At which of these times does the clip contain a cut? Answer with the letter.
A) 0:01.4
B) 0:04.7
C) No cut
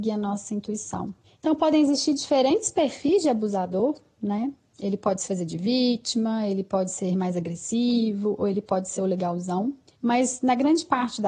A